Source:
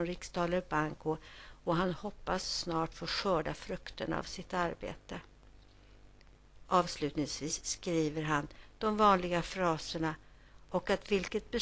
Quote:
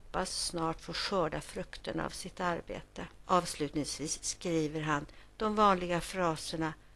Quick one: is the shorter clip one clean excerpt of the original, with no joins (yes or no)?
no